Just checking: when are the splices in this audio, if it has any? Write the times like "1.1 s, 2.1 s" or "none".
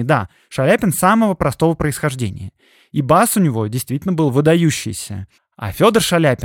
5.4 s